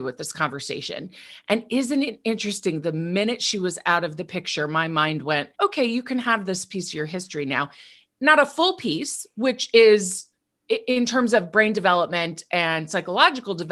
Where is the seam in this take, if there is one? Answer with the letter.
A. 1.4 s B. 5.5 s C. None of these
B